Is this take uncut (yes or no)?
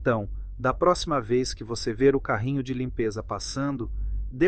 yes